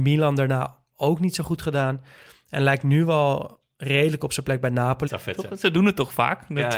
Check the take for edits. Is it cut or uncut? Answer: cut